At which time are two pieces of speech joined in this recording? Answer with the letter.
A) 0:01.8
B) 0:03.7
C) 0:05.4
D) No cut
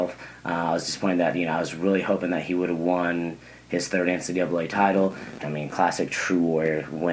C